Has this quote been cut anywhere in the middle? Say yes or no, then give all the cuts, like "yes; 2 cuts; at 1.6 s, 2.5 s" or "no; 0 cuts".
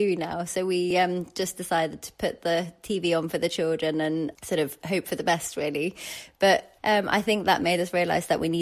no; 0 cuts